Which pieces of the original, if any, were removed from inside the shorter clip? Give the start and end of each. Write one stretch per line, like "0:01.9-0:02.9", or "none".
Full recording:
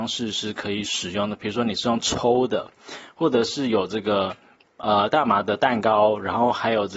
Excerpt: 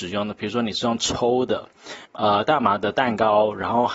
0:03.1-0:04.7